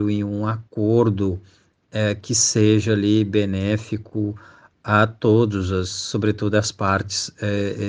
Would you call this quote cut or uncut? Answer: uncut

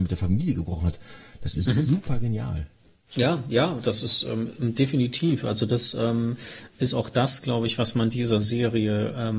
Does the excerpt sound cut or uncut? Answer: cut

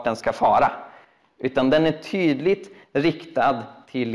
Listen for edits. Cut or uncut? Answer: uncut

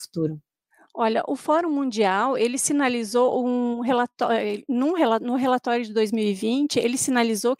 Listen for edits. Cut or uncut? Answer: uncut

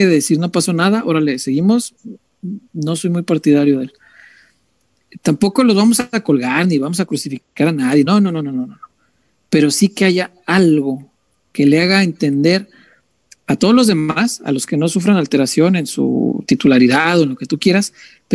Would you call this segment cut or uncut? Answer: uncut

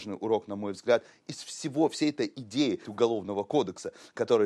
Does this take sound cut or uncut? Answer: cut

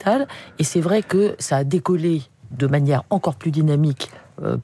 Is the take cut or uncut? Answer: cut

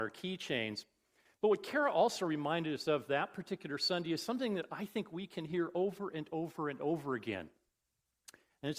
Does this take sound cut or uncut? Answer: uncut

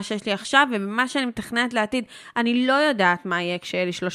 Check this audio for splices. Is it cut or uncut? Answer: uncut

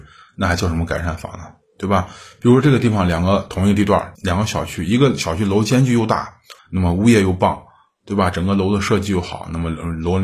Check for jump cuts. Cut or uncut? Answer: cut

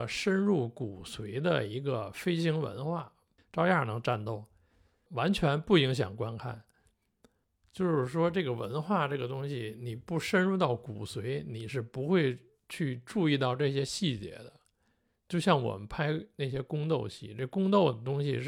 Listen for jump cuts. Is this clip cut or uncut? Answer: cut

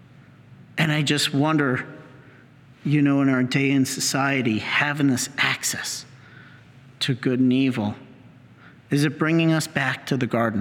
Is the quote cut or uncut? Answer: uncut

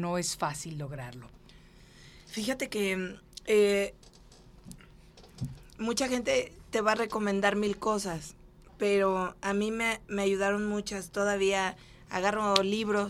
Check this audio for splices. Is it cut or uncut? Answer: uncut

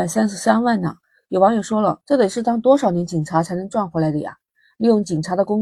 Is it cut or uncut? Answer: uncut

